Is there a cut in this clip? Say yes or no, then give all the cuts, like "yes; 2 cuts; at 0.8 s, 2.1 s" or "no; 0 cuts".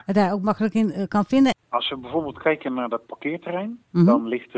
yes; 1 cut; at 1.5 s